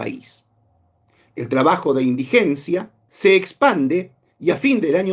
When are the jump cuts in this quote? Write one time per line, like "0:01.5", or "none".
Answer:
0:03.1